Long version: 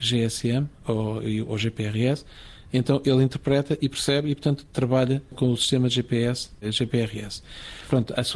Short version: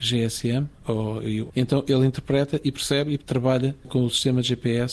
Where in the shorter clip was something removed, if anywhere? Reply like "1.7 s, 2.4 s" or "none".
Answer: 1.5 s, 3.2 s

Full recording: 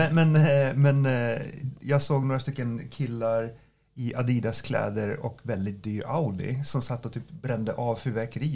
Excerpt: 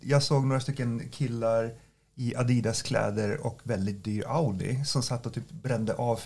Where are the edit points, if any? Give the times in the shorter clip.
none

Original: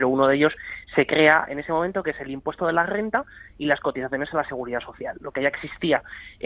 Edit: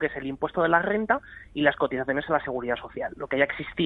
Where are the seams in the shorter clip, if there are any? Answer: none

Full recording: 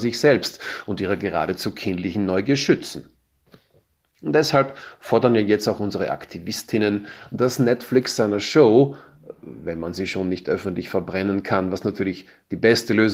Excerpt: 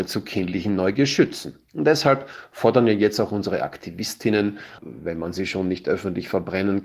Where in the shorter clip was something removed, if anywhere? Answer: 1.7 s, 4.8 s

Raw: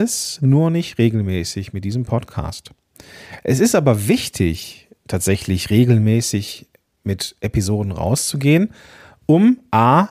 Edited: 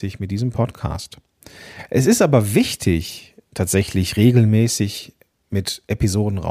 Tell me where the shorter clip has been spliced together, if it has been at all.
none

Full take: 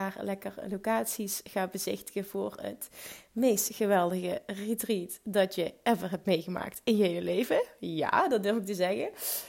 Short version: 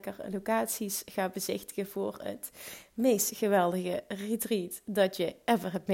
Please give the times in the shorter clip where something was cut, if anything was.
none

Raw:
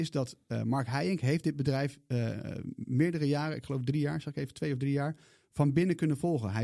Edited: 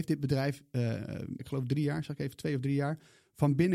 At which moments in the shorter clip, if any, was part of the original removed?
1.4 s

